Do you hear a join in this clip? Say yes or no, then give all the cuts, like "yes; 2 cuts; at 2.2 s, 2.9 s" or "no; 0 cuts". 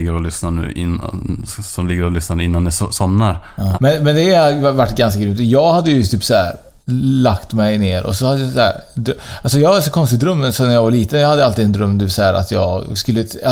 yes; 2 cuts; at 1.5 s, 3.7 s